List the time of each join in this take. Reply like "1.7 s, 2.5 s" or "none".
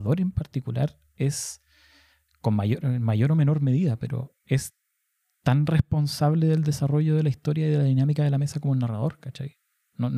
none